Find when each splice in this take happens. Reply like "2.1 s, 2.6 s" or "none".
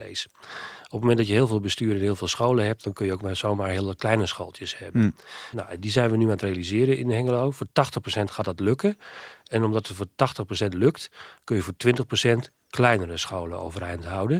5.5 s